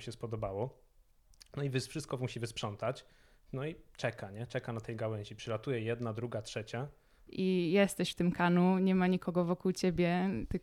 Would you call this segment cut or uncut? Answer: cut